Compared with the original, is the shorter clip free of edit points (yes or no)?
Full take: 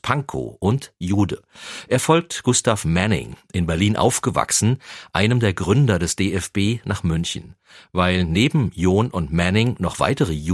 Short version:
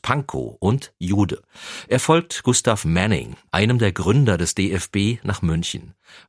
no